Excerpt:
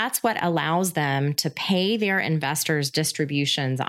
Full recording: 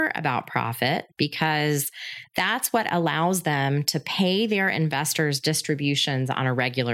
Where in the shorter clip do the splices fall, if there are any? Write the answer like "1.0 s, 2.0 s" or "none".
none